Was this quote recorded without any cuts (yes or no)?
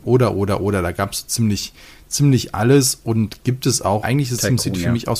no